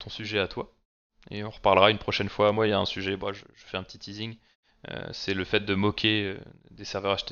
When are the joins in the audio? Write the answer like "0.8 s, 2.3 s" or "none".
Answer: none